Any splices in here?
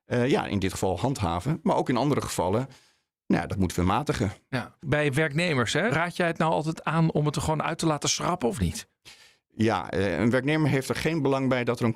yes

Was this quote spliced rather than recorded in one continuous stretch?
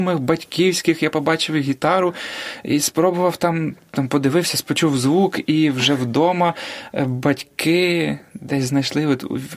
no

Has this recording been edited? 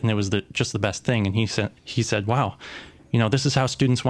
no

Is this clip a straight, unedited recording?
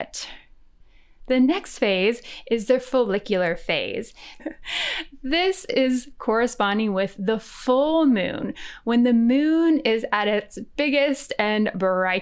no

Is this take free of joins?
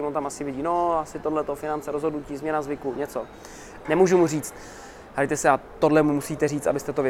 no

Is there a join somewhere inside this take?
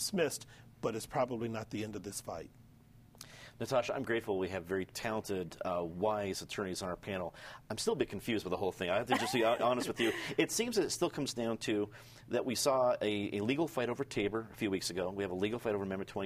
no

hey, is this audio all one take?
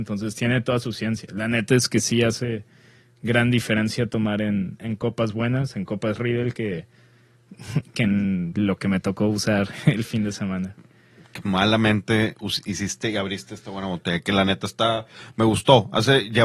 no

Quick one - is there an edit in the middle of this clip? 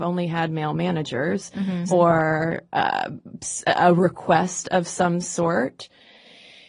yes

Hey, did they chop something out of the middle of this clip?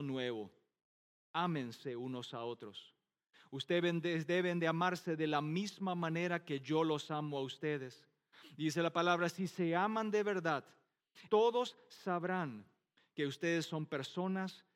yes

